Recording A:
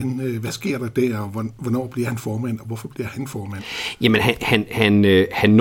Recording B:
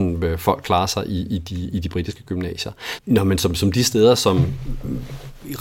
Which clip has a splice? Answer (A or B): B